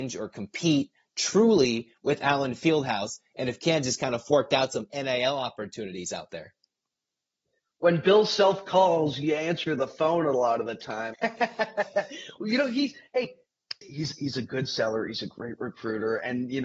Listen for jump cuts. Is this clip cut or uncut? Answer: cut